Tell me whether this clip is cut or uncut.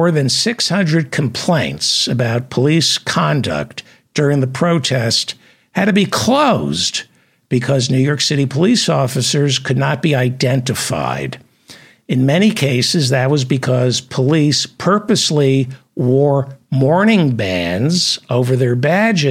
uncut